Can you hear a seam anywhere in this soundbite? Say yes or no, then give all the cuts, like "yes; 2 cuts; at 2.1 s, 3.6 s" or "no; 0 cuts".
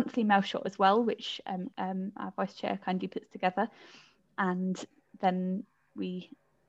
yes; 1 cut; at 1.7 s